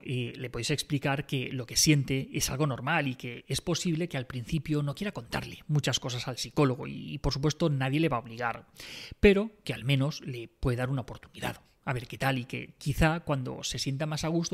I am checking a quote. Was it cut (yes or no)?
no